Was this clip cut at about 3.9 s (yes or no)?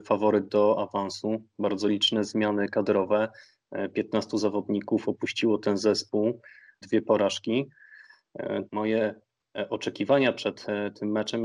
no